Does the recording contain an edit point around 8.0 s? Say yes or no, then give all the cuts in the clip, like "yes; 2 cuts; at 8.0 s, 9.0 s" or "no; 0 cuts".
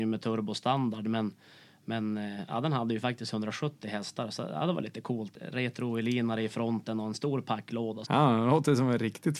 yes; 1 cut; at 8.0 s